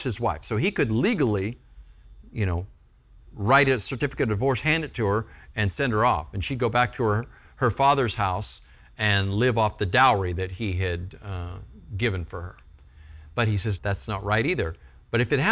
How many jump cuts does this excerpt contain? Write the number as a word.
one